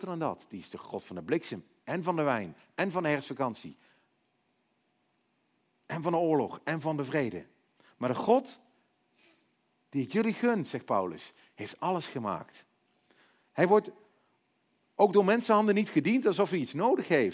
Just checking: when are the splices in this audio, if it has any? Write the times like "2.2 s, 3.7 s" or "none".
13.4 s